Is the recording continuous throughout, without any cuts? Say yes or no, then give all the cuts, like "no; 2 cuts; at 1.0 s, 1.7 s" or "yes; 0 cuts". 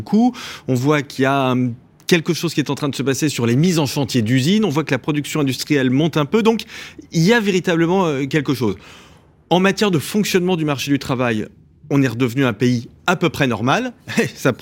yes; 0 cuts